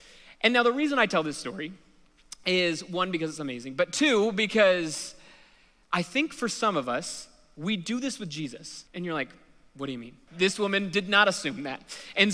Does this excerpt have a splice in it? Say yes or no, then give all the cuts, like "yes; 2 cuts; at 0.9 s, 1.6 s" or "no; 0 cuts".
yes; 2 cuts; at 8.9 s, 10.3 s